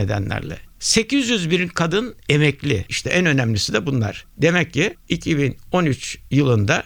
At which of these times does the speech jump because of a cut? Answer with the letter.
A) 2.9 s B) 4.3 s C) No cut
A